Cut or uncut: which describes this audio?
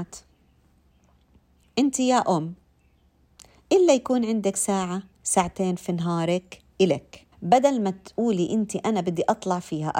cut